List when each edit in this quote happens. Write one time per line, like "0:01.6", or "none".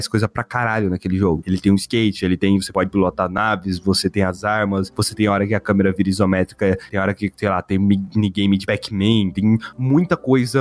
0:01.4